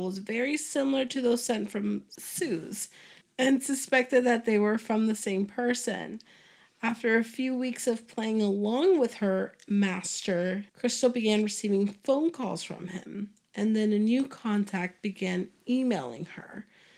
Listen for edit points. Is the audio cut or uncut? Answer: cut